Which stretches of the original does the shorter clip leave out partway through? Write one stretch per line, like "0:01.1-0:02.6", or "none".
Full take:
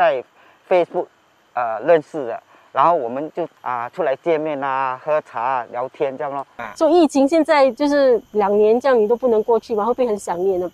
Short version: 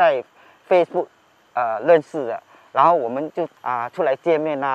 none